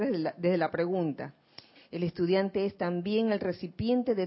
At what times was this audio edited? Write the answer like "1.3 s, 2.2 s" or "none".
1.8 s